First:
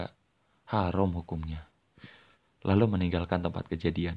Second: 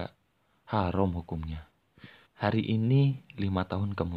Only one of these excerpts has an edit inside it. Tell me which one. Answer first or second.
second